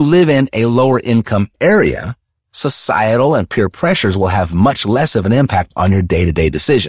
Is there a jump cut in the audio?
no; 0 cuts

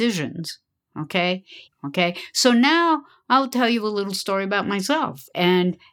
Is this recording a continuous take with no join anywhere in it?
no; 1 cut; at 1.7 s

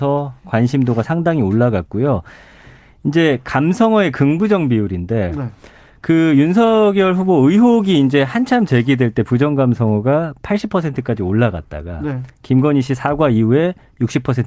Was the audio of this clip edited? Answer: no; 0 cuts

